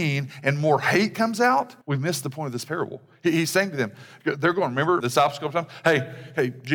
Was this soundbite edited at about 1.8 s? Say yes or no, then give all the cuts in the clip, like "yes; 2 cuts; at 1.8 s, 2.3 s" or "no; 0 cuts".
yes; 2 cuts; at 1.8 s, 5.0 s